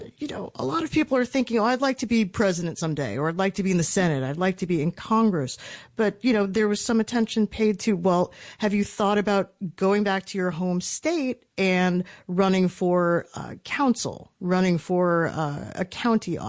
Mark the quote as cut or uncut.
uncut